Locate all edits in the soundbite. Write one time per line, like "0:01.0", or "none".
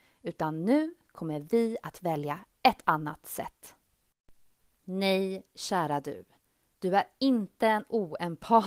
0:04.6

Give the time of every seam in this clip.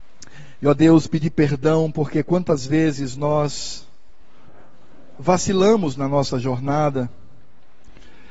none

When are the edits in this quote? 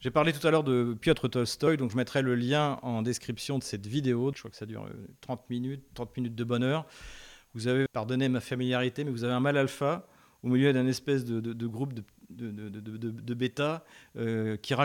0:04.3
0:07.9

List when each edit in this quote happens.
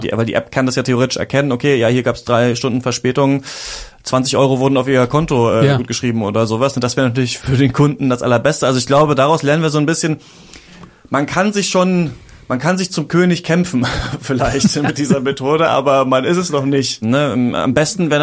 0:17.0

